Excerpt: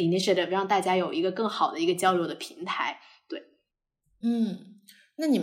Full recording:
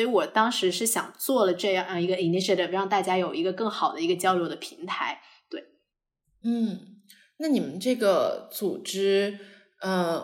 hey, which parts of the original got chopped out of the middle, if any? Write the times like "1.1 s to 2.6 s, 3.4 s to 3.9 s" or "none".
none